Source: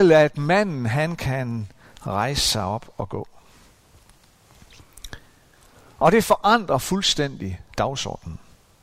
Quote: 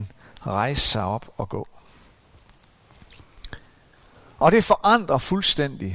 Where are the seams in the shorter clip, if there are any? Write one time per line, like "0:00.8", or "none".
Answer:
none